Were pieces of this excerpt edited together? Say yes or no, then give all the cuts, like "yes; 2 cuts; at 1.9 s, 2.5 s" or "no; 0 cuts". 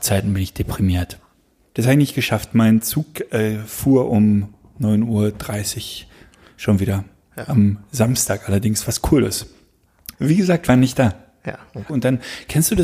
yes; 3 cuts; at 1.7 s, 10.1 s, 11.9 s